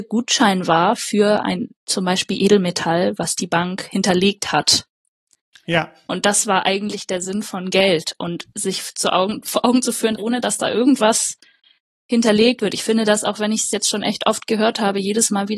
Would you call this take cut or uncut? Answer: cut